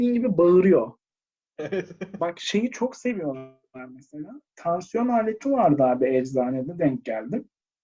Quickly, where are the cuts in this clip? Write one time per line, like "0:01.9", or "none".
0:02.2
0:04.5